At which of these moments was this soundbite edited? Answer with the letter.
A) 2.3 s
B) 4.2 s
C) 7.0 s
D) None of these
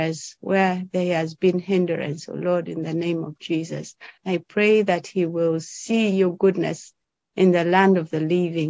B